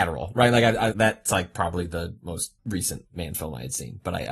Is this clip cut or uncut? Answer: cut